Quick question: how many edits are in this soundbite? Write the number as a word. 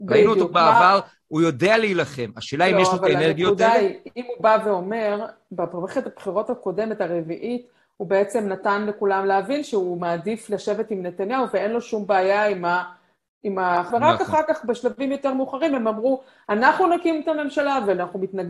one